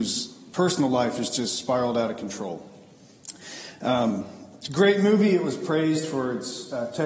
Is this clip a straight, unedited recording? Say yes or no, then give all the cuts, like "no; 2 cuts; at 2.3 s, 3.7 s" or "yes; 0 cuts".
yes; 0 cuts